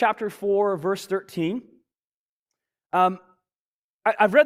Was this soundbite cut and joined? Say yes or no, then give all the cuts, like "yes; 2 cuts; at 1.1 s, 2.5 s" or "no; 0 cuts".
no; 0 cuts